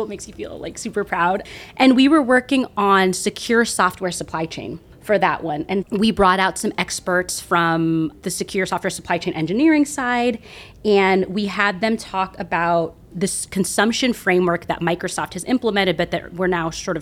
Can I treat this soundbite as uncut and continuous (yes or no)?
no